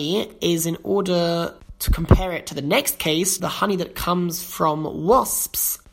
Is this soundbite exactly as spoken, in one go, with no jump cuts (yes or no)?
no